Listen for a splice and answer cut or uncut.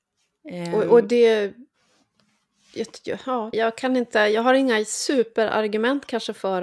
cut